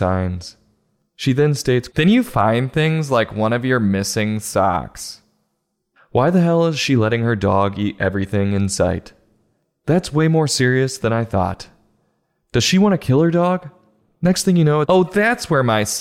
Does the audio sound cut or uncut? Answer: cut